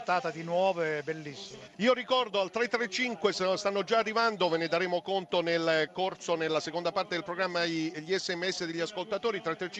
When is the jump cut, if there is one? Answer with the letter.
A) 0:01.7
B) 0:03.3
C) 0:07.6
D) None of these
A